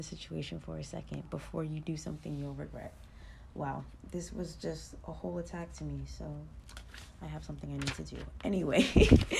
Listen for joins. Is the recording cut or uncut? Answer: uncut